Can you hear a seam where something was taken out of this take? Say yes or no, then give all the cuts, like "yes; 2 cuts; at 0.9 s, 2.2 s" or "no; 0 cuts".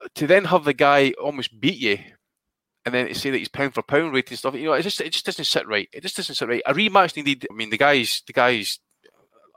yes; 1 cut; at 7.5 s